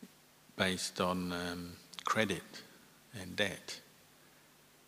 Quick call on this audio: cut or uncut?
uncut